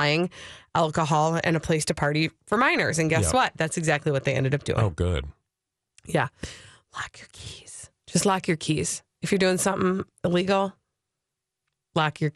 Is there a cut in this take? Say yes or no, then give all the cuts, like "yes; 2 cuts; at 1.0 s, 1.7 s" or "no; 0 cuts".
no; 0 cuts